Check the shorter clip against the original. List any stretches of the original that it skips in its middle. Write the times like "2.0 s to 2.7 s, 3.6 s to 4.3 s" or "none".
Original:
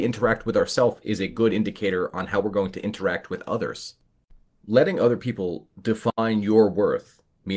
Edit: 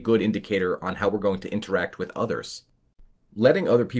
none